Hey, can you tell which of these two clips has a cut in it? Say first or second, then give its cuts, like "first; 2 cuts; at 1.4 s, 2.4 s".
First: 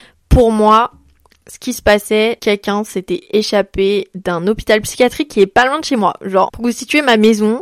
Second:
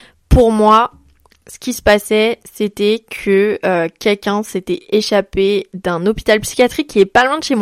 first; 2 cuts; at 2.4 s, 6.5 s